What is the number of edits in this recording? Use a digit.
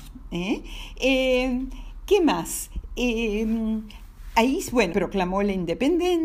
1